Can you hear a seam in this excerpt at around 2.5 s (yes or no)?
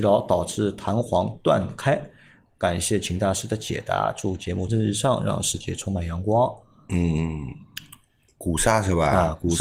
no